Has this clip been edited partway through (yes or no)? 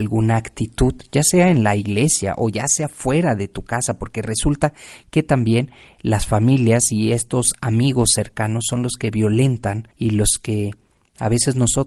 no